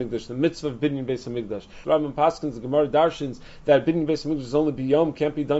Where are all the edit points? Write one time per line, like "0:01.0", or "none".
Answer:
0:01.8

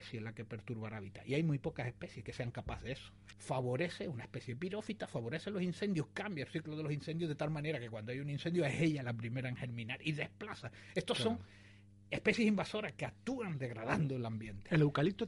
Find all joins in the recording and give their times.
0:03.3

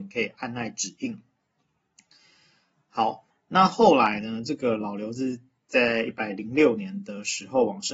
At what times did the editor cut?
0:03.3

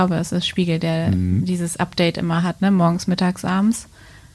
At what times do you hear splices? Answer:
none

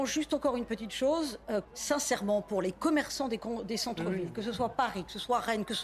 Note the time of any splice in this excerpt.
0:01.6

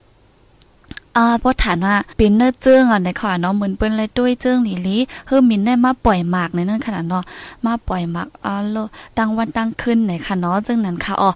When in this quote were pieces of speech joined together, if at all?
0:02.1

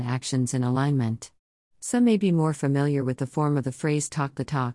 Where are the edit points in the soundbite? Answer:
0:01.7

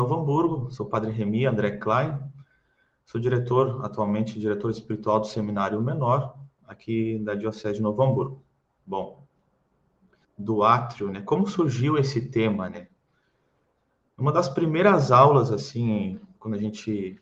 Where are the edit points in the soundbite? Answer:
0:10.2

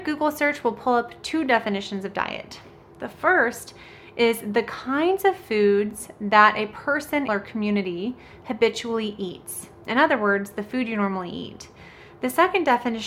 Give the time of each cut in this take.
0:07.3

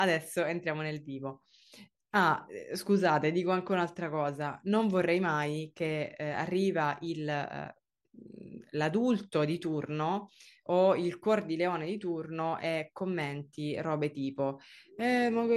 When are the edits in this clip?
none

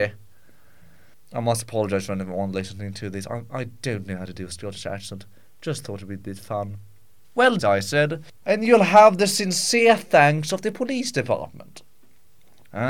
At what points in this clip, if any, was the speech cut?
0:07.6

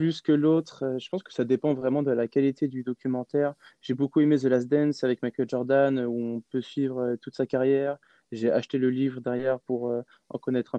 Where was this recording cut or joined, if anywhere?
none

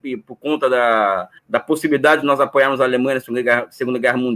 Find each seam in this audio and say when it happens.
0:01.4

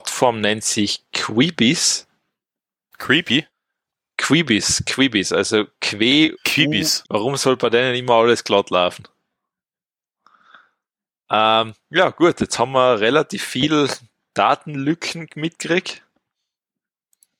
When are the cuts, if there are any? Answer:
0:07.0

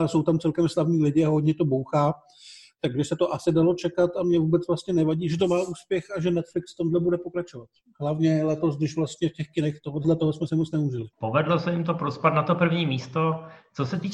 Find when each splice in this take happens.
0:10.0
0:11.1

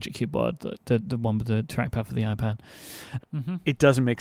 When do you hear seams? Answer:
0:03.2

